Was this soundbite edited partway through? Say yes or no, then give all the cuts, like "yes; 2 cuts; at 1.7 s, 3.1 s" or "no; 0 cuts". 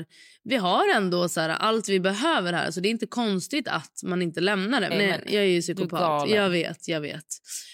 yes; 1 cut; at 4.9 s